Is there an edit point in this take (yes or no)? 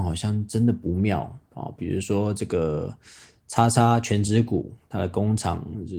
no